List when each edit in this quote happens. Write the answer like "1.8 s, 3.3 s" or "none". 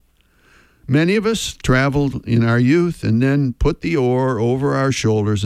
1.6 s